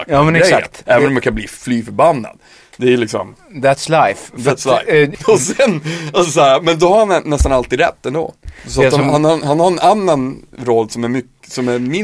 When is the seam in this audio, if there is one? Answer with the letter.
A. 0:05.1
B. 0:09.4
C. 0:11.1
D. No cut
A